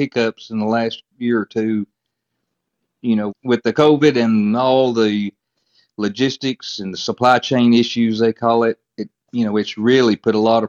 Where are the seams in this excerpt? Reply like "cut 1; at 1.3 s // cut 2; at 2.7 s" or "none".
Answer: cut 1; at 3.3 s